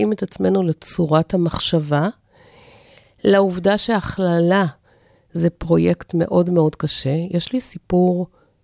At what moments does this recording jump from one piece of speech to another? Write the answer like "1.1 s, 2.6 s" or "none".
none